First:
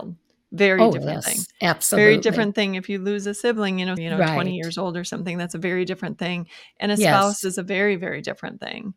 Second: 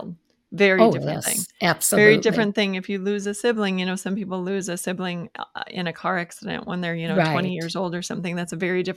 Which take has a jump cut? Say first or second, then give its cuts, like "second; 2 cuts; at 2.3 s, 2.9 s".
first; 1 cut; at 4.0 s